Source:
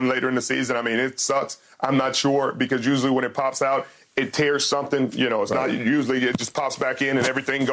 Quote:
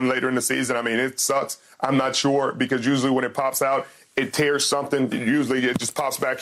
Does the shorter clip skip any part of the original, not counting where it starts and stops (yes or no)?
yes